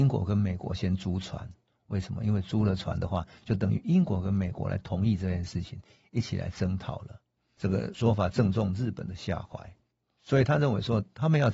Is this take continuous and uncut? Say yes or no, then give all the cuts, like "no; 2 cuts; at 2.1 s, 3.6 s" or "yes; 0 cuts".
no; 1 cut; at 7.4 s